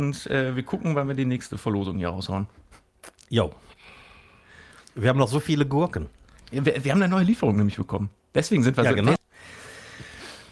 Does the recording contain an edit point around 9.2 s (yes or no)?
yes